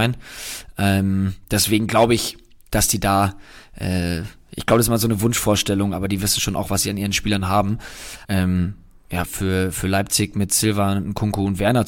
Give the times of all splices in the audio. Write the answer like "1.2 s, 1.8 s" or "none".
8.2 s, 9.3 s